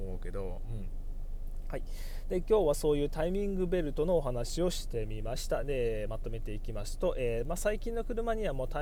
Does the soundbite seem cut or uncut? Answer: uncut